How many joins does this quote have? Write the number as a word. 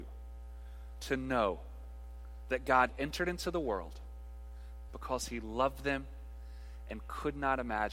one